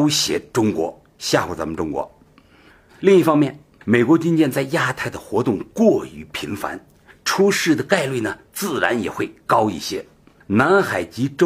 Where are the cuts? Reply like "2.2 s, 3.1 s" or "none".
2.9 s

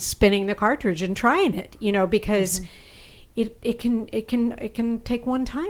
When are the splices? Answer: none

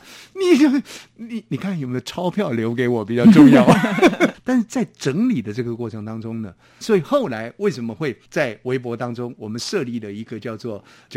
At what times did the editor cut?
4.3 s, 6.8 s, 8.3 s

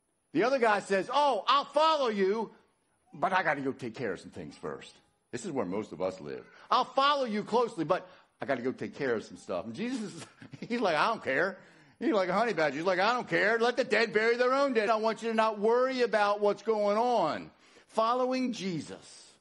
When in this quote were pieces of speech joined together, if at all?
14.9 s

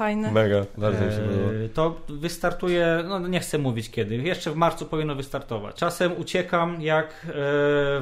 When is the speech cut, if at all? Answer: 5.8 s

